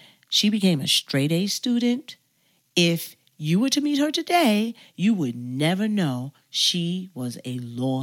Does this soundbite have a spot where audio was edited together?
no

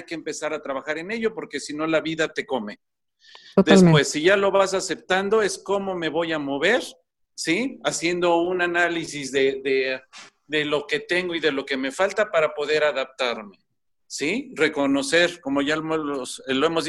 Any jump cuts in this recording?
no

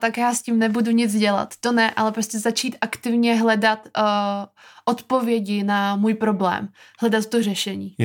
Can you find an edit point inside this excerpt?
no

